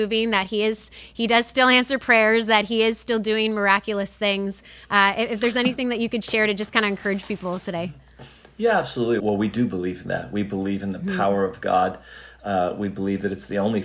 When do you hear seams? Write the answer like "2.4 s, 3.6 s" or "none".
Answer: 9.2 s